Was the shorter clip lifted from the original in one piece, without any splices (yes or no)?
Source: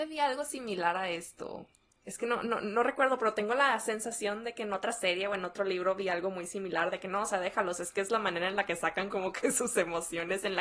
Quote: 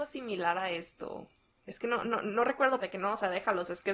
no